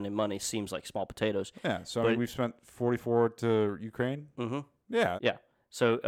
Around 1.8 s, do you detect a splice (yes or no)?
no